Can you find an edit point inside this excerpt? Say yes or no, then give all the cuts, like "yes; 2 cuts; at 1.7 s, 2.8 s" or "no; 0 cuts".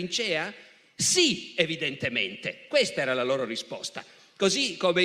no; 0 cuts